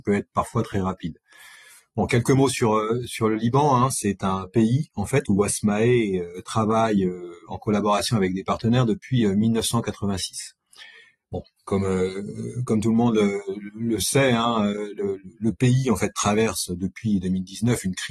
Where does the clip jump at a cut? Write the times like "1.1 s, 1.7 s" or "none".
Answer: none